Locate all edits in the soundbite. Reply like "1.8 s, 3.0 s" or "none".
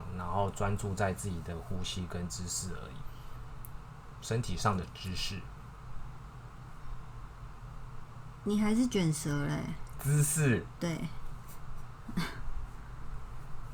none